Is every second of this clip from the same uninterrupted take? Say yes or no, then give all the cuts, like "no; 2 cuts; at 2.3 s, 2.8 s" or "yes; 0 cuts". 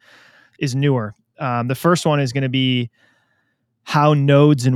yes; 0 cuts